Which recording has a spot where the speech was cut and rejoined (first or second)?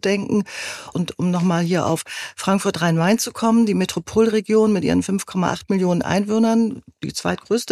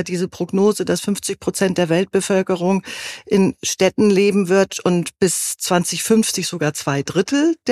first